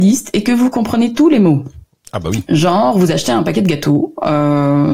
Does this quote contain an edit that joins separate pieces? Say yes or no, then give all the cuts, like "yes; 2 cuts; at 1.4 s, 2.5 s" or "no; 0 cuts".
no; 0 cuts